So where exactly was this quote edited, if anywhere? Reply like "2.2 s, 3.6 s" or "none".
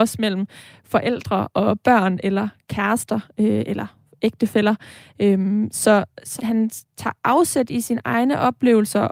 6.4 s